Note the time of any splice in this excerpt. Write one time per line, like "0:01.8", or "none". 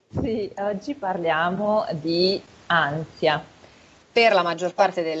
0:04.0